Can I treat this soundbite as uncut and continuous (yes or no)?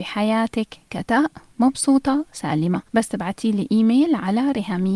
no